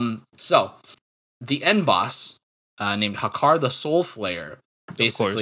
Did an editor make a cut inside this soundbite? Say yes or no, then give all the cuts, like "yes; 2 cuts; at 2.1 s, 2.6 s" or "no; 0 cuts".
no; 0 cuts